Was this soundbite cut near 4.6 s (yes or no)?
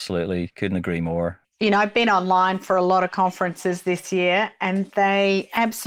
no